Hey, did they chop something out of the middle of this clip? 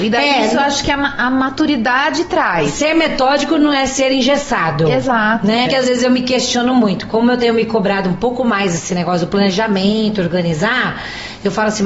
yes; 1 cut; at 5.7 s

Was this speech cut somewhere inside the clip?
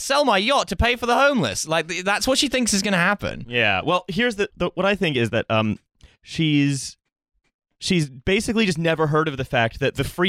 yes; 1 cut; at 4.5 s

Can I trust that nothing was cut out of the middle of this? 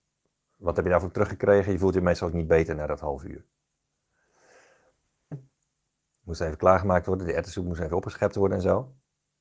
no; 1 cut; at 5.3 s

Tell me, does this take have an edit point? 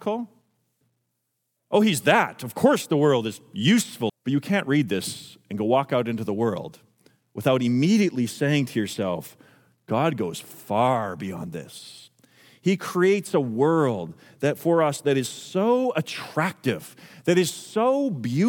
yes; 1 cut; at 4.1 s

